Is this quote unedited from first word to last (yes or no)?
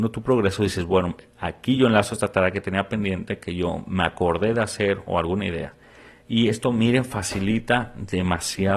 yes